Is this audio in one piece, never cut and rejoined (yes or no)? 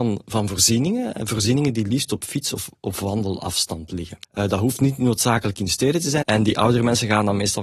no